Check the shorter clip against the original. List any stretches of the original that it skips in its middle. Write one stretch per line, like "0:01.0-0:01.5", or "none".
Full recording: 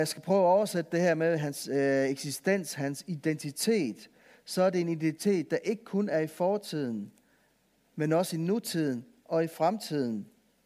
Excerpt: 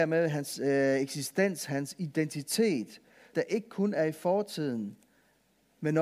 0:04.4-0:05.5